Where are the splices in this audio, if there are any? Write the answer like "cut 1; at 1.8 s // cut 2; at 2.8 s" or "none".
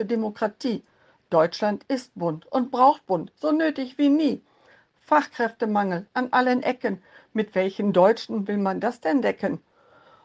none